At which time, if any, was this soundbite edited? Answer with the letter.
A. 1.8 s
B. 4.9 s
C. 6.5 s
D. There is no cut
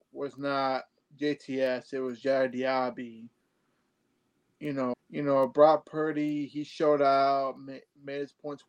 B